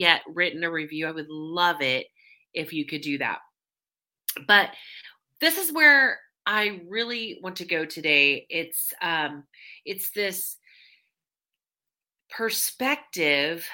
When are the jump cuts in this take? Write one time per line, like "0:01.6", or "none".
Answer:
none